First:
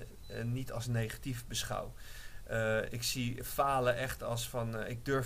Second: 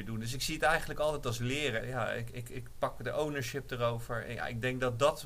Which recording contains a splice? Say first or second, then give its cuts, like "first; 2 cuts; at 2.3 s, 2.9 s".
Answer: second; 1 cut; at 1.8 s